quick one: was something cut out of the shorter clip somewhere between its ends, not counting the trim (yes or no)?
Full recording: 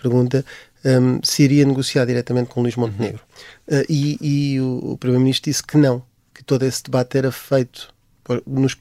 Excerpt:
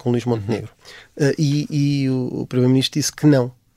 no